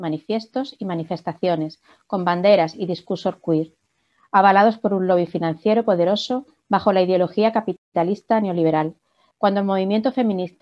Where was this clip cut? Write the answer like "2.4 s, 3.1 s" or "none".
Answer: 9.3 s